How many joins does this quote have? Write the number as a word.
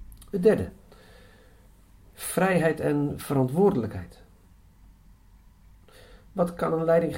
zero